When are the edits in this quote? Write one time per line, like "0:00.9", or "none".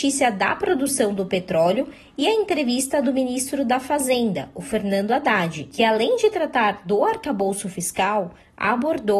none